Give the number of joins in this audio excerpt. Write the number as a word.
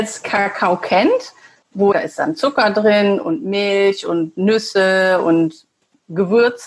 one